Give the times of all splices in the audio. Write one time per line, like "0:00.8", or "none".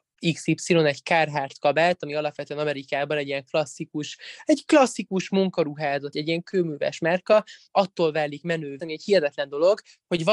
0:06.1
0:08.8

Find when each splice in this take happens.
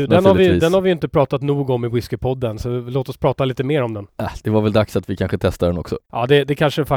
0:06.0

